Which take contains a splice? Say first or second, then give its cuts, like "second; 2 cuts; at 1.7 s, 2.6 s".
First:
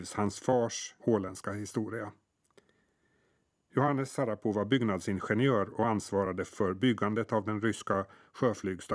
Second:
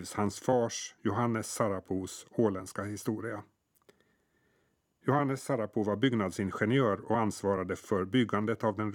first; 1 cut; at 1.0 s